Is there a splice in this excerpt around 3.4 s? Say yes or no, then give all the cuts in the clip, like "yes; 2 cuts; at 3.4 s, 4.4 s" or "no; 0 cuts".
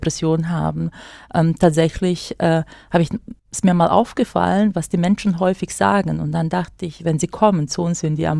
yes; 1 cut; at 3.4 s